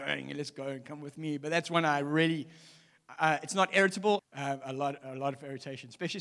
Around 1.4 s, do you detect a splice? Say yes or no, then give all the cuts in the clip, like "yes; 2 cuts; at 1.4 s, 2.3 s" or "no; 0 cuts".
no; 1 cut; at 4.2 s